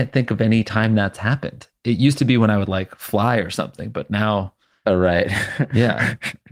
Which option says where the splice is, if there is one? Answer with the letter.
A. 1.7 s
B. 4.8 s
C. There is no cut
C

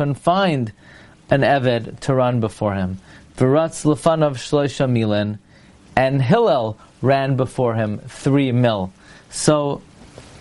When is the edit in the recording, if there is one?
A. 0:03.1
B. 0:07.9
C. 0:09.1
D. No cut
D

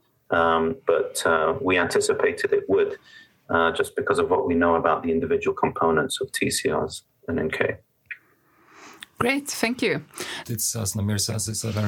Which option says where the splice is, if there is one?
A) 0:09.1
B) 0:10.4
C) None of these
B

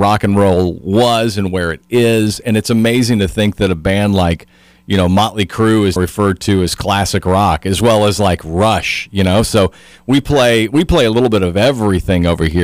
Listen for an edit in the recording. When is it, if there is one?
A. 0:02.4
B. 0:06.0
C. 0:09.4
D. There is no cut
B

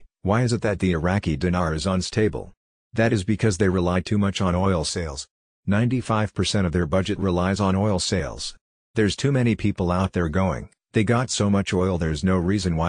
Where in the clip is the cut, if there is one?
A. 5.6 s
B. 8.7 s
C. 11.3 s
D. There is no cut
D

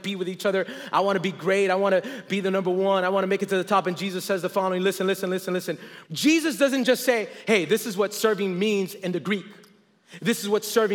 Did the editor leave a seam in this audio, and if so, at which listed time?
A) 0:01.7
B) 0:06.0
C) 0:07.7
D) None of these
B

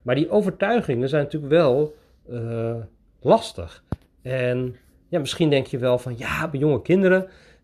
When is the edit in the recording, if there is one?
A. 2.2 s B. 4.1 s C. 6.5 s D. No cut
D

